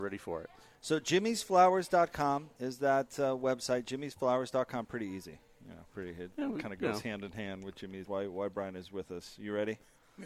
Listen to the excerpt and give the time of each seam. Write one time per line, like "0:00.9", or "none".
0:08.0